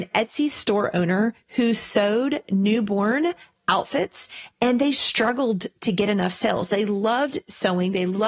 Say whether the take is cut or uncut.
uncut